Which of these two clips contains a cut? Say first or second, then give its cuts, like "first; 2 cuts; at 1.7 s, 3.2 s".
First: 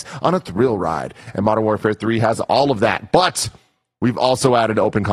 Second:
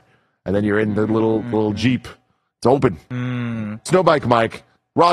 second; 1 cut; at 3.1 s